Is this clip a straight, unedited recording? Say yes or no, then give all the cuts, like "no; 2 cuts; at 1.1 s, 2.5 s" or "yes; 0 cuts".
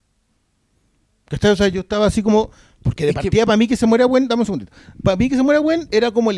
yes; 0 cuts